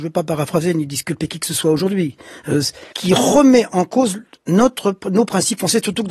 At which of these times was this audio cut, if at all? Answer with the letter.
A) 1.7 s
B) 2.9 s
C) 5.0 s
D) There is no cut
B